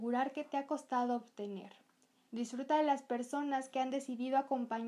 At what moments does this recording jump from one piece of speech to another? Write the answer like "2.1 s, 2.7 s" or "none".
2.3 s